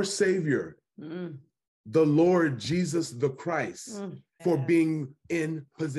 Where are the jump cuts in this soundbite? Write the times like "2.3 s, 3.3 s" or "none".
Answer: 4.4 s